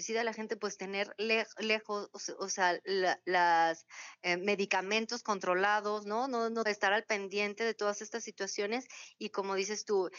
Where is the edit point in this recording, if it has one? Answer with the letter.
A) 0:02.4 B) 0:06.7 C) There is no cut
B